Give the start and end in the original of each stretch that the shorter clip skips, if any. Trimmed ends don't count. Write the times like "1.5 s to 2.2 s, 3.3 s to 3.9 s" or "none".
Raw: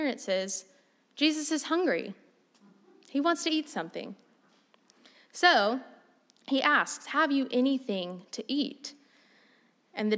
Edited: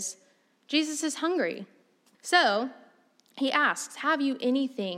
2.6 s to 5.2 s